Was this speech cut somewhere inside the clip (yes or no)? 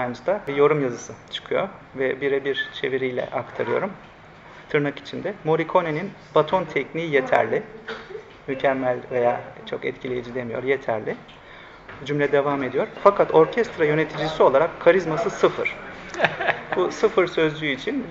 no